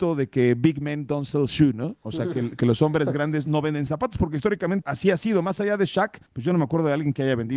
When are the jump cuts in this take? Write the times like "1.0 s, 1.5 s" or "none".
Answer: 4.8 s, 6.3 s